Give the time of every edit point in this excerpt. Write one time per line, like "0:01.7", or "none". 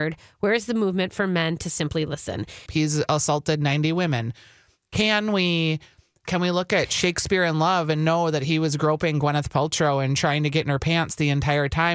0:02.7
0:06.2